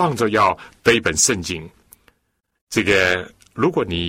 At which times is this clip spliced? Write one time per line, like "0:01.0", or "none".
0:02.6